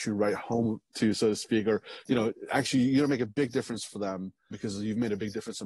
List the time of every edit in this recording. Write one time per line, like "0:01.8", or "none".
0:04.5